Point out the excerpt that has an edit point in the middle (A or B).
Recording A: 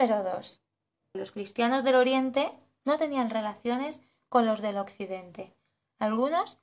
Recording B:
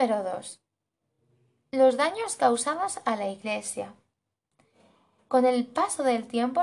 A